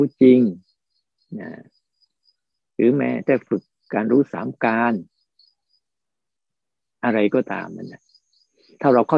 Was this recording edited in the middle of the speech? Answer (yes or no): no